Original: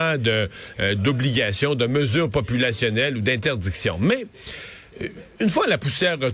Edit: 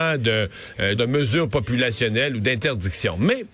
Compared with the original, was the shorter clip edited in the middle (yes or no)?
yes